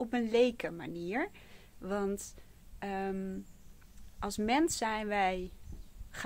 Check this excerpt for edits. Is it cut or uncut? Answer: uncut